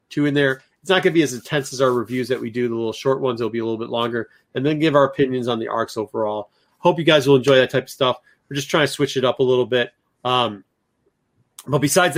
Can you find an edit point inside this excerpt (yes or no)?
no